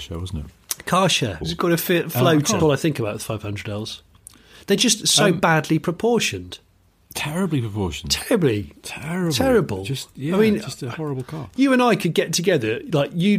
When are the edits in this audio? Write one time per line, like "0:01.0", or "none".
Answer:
0:01.4
0:02.6